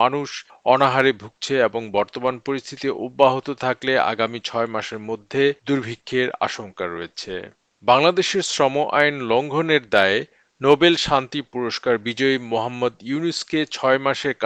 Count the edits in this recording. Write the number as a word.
one